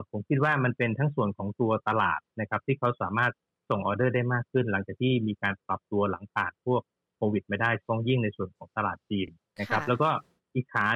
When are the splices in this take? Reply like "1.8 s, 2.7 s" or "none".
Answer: none